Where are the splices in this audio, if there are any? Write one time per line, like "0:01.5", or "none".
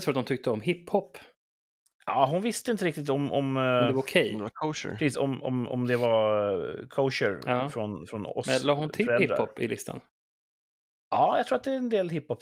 none